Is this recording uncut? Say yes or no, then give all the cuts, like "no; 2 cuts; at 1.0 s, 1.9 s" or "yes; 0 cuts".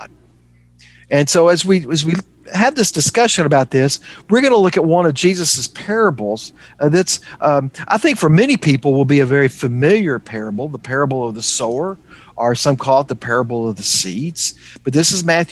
yes; 0 cuts